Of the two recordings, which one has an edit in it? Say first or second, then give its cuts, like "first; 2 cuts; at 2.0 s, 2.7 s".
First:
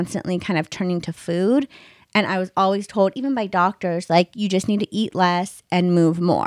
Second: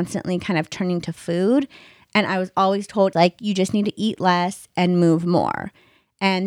second; 1 cut; at 3.1 s